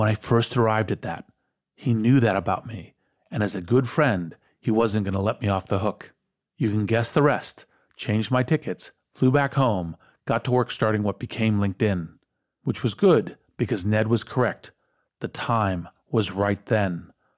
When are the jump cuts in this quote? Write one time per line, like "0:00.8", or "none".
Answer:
none